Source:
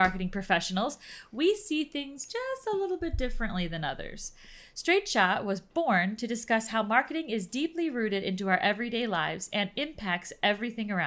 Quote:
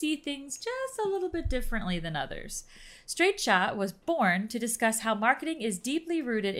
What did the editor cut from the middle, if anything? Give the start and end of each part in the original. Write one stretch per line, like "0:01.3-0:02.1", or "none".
none